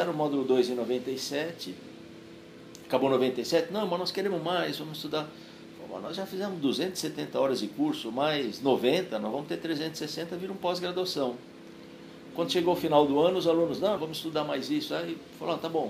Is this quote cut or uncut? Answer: cut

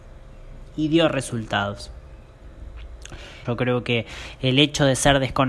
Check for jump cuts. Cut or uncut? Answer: cut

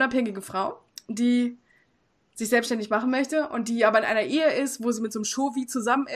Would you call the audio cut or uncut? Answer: uncut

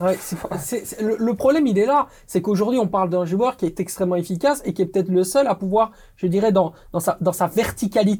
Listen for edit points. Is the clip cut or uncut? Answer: uncut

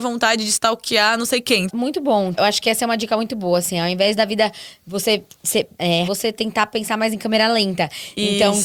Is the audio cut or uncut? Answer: cut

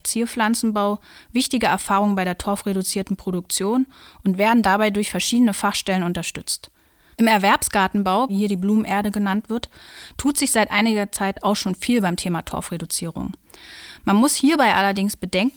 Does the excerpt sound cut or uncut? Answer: cut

